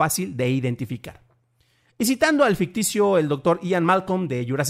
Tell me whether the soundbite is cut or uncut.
uncut